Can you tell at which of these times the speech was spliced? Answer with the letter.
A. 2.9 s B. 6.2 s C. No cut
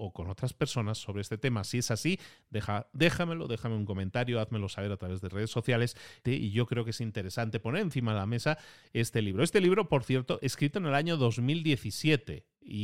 B